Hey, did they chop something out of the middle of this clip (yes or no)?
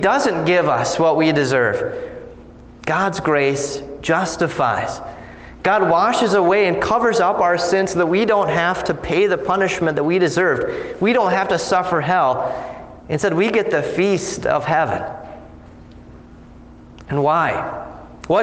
no